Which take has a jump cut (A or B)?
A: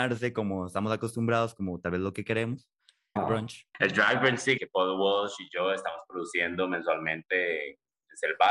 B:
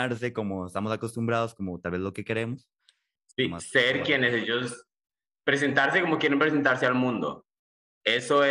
A